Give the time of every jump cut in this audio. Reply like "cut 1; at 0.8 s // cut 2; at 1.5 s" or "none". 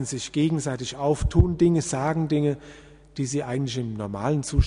none